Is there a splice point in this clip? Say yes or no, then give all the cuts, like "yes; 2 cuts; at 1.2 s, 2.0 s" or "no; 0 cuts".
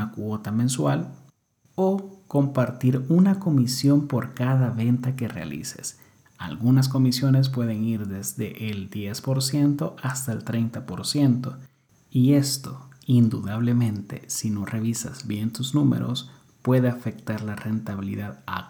no; 0 cuts